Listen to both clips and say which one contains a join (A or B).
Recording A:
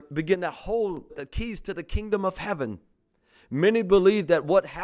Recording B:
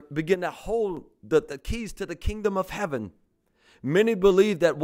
A